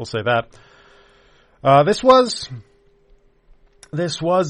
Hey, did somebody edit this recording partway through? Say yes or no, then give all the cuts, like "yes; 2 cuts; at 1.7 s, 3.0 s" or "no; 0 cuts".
no; 0 cuts